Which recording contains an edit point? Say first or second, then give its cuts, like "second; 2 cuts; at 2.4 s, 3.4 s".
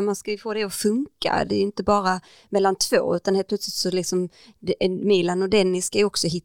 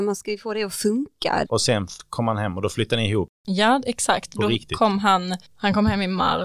second; 1 cut; at 1.5 s